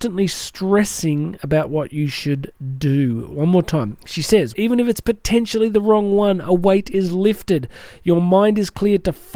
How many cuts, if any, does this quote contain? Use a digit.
1